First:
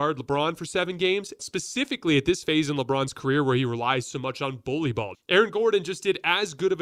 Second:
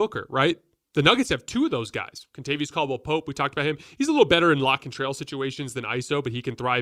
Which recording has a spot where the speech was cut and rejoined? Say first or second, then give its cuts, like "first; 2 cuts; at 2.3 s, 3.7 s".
first; 2 cuts; at 1.4 s, 5.1 s